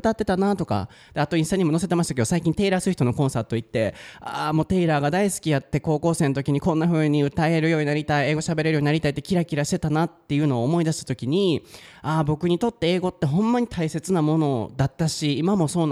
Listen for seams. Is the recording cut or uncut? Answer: uncut